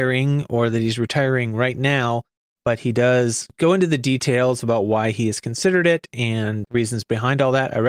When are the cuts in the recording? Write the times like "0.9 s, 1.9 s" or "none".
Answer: 6.6 s